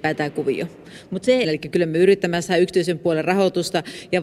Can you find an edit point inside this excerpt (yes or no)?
yes